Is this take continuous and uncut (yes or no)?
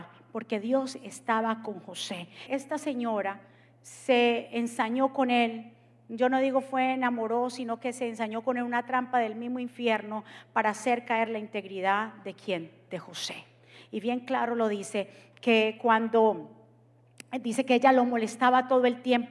no